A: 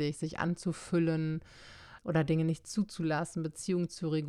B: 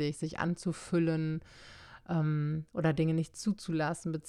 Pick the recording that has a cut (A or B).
A